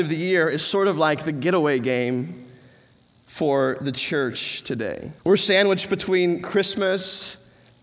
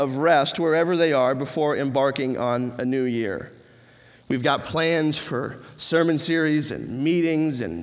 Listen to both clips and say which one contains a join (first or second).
first